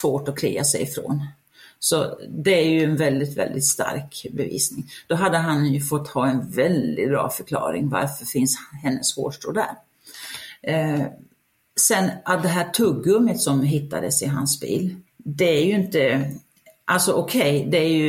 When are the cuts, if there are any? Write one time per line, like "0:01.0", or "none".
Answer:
0:15.1